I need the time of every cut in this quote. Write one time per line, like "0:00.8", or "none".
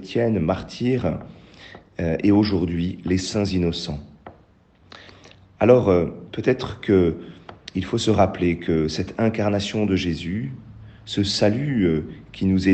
none